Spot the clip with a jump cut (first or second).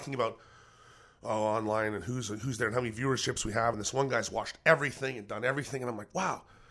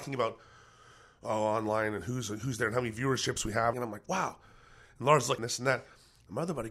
second